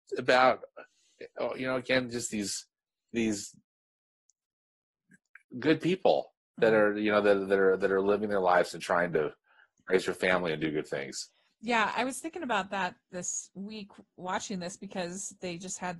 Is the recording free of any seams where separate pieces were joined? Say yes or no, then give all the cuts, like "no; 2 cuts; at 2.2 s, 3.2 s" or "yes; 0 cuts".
yes; 0 cuts